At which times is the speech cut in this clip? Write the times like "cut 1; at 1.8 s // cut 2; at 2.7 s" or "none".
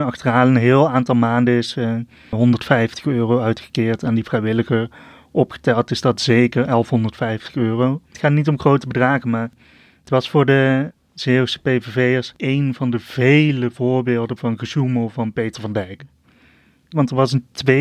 cut 1; at 2.3 s